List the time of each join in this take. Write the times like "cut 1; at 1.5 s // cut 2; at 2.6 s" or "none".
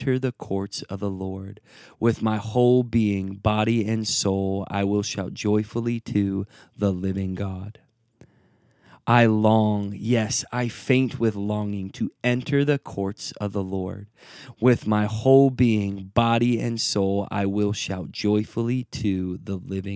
none